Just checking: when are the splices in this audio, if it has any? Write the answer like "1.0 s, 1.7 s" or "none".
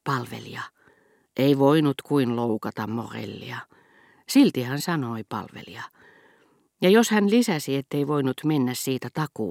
none